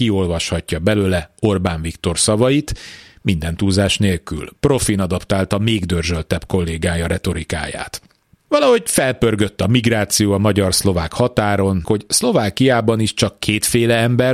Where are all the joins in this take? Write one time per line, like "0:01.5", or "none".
0:08.5
0:11.8